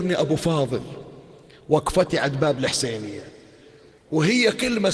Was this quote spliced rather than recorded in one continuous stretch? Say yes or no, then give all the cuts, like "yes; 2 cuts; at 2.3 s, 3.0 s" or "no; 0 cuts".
no; 0 cuts